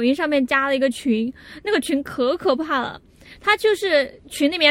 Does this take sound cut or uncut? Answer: uncut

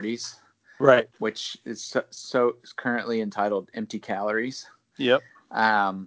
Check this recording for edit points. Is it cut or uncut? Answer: cut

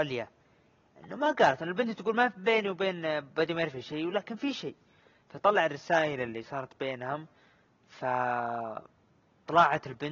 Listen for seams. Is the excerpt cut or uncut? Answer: uncut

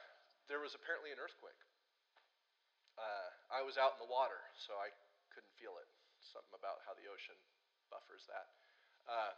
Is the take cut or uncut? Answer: uncut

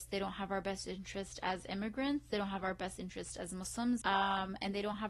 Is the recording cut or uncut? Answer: cut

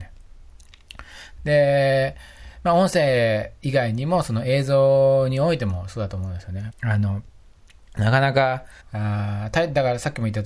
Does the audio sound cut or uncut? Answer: cut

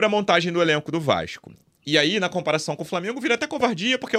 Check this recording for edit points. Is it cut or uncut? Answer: uncut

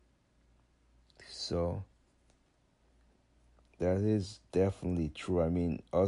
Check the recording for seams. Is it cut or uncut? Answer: uncut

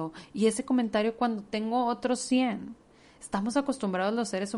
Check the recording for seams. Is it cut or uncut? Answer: uncut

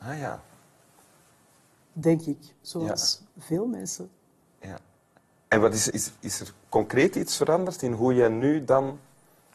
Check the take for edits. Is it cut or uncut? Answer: cut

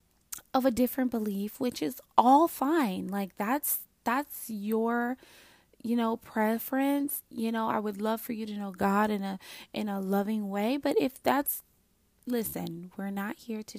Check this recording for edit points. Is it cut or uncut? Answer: uncut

